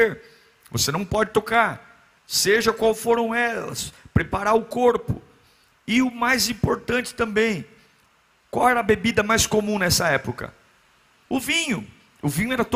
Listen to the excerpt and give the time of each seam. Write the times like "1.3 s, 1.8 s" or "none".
2.2 s